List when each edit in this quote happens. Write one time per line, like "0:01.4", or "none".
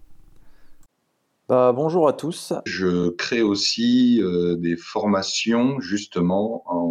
0:02.7